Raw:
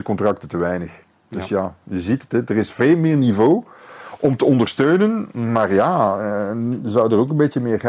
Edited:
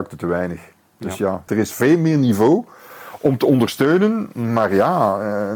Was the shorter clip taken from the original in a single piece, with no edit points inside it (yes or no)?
no